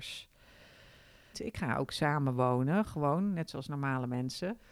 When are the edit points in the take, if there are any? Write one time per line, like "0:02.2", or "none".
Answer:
0:01.3